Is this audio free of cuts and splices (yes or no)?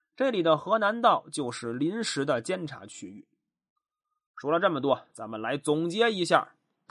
yes